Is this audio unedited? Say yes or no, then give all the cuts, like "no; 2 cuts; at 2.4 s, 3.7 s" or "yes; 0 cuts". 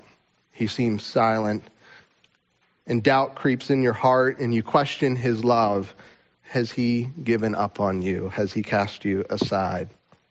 yes; 0 cuts